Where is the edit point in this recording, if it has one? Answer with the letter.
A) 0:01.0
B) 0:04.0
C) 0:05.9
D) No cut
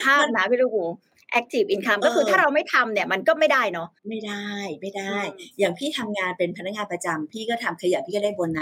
B